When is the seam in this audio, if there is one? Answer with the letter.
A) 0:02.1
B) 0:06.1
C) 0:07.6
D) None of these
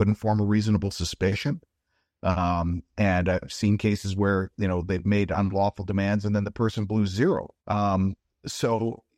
C